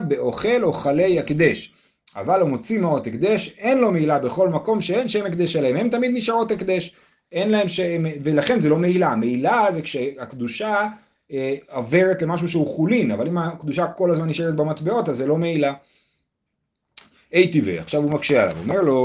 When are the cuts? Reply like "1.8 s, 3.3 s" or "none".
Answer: none